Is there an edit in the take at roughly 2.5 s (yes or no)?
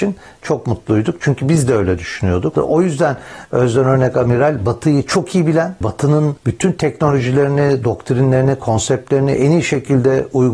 yes